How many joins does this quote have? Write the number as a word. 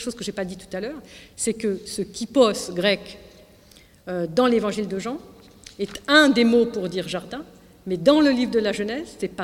zero